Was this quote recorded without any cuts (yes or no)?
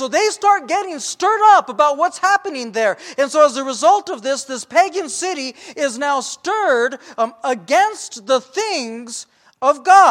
yes